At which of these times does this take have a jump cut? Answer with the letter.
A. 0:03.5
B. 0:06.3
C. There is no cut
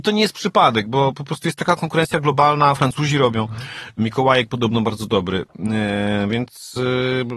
C